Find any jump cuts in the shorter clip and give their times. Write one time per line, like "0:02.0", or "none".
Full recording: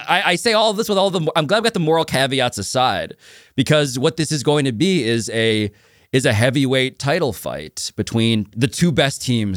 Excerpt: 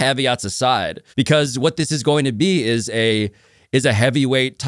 0:01.1